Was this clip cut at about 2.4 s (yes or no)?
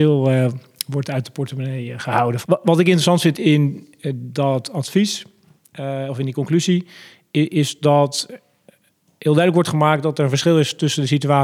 yes